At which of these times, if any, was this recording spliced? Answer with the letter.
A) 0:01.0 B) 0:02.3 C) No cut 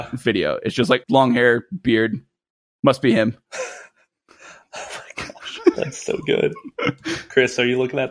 A